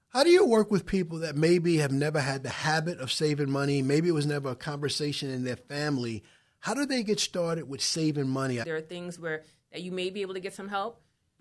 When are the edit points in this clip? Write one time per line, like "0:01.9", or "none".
0:08.6